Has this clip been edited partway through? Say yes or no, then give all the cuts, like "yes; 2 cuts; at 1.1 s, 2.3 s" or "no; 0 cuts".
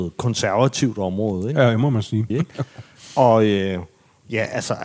yes; 1 cut; at 2.3 s